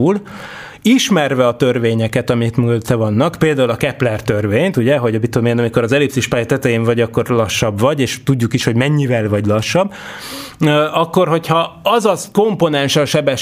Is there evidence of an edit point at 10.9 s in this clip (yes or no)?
no